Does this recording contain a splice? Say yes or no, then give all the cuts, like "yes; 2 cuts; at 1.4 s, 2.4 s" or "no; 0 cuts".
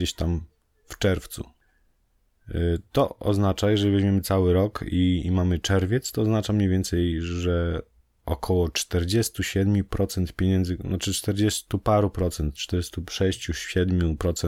no; 0 cuts